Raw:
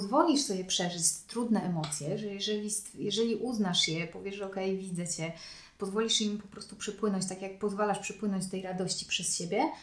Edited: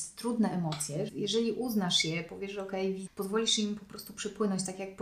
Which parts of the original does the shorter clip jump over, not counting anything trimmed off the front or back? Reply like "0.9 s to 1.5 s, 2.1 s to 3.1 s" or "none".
2.2 s to 2.9 s, 4.9 s to 5.7 s